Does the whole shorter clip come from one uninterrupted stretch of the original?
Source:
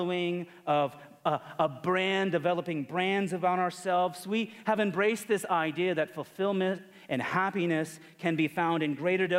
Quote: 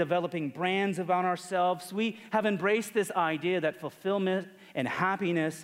yes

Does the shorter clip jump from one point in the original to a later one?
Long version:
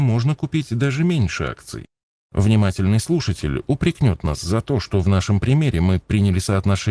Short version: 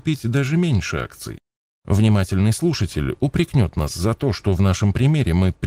no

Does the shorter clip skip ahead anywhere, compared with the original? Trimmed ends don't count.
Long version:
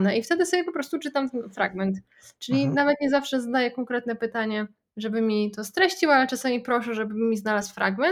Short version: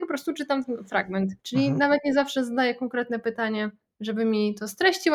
yes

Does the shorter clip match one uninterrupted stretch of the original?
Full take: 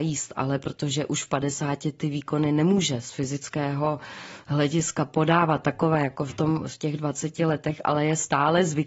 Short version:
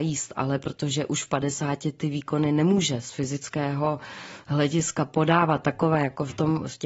yes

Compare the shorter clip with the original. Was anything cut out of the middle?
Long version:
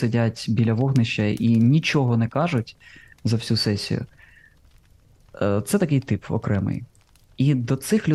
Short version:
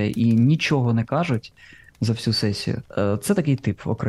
yes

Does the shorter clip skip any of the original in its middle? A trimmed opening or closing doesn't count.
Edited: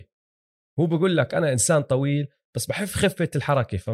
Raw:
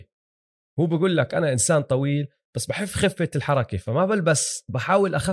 no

